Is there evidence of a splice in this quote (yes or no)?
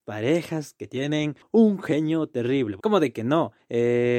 yes